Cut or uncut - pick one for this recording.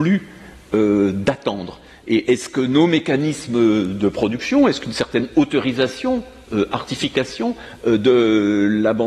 uncut